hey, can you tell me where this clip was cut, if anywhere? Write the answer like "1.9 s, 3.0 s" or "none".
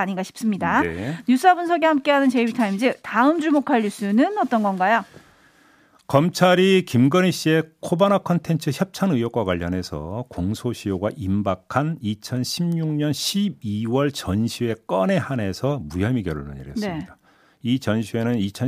none